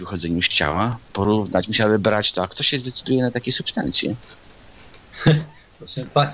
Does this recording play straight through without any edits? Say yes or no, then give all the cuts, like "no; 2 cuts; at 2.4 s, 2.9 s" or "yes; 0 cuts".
yes; 0 cuts